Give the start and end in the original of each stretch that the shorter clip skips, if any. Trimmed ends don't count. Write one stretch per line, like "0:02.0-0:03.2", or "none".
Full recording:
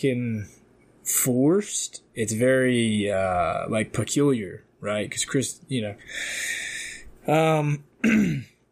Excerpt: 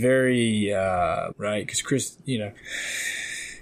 0:03.7-0:04.7

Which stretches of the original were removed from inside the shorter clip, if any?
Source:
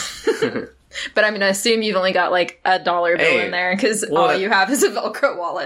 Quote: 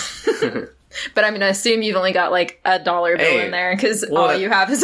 none

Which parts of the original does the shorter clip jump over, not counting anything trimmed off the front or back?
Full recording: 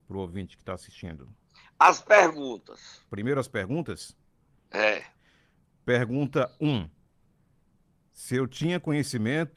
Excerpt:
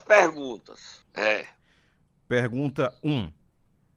0:03.0-0:04.6

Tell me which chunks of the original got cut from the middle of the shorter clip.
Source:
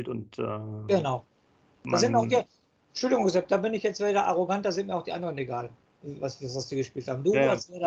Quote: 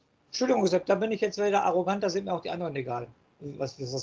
none

